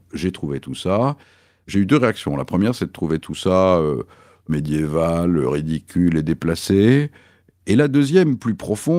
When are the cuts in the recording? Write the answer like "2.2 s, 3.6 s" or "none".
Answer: none